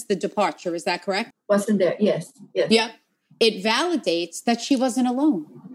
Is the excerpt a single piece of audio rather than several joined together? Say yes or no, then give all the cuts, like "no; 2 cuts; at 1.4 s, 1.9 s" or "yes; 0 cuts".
no; 1 cut; at 1.3 s